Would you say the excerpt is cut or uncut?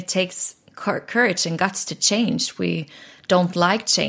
uncut